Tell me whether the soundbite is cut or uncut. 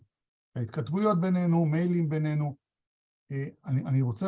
uncut